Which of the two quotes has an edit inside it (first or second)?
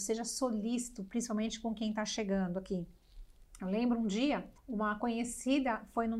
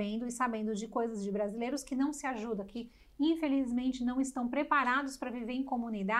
first